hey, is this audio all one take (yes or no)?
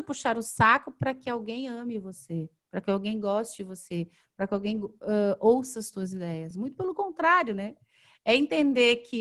yes